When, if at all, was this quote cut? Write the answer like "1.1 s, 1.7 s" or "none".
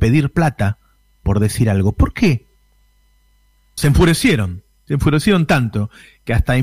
3.8 s